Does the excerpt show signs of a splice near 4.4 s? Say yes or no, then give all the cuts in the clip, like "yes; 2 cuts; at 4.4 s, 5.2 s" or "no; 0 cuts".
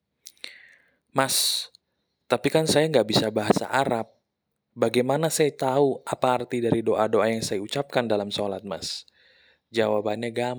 no; 0 cuts